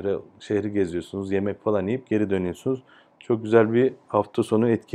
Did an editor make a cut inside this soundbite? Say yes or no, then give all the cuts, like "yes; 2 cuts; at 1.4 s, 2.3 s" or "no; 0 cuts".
no; 0 cuts